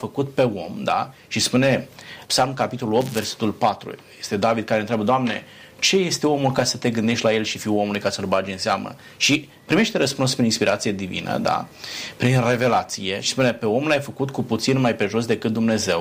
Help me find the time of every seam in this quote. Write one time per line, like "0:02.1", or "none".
0:02.2